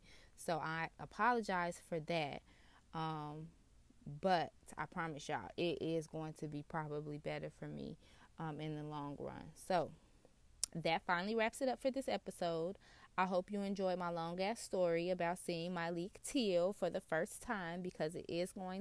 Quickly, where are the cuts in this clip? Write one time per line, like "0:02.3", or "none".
none